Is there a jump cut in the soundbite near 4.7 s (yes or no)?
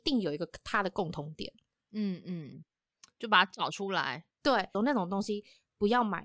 yes